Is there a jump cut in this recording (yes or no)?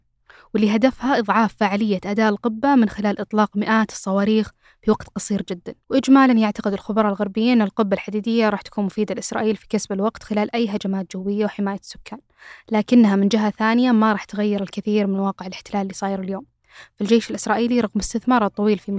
yes